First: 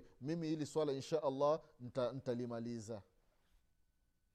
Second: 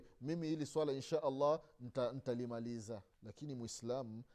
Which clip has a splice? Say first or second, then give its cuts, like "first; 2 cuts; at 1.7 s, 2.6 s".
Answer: second; 1 cut; at 3.1 s